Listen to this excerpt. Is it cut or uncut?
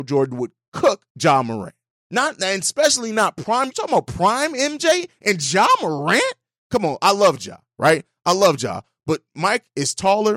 uncut